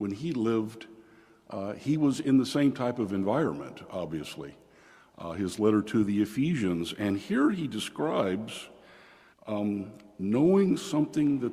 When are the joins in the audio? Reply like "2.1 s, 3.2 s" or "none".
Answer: 9.3 s